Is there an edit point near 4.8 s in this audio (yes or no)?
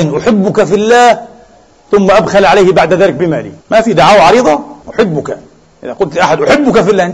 yes